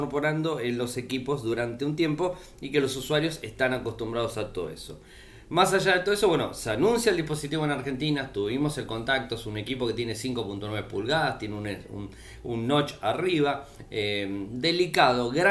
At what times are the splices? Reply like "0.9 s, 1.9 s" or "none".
none

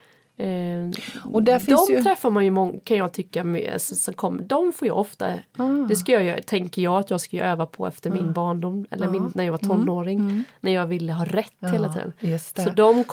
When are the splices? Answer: none

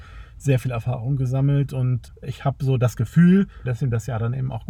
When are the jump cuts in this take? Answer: 3.7 s

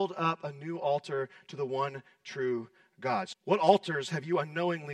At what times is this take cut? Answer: 3.3 s

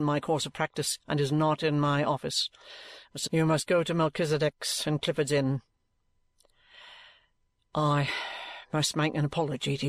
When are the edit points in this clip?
3.3 s

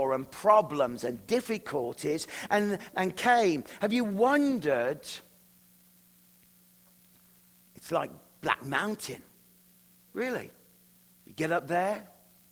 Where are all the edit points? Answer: 2.9 s, 7.7 s

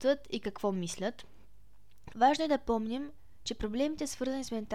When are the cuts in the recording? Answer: 2.1 s

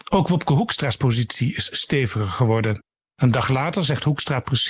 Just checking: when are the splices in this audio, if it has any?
3.1 s

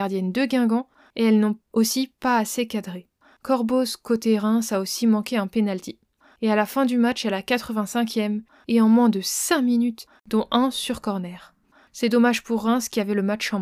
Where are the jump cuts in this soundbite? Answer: 10.1 s

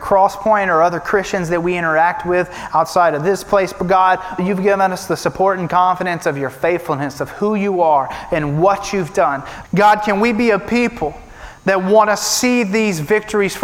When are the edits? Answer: 4.4 s, 9.6 s

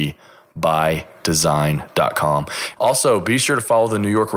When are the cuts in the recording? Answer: 2.7 s

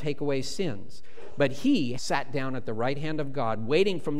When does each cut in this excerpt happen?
2.0 s

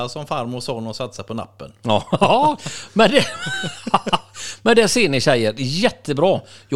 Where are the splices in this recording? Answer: none

